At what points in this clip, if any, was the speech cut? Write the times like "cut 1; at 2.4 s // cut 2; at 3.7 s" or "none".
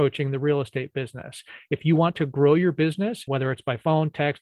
cut 1; at 3.3 s